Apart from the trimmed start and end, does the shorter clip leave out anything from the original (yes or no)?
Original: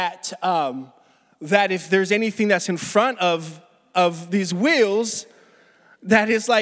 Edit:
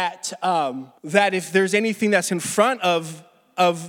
yes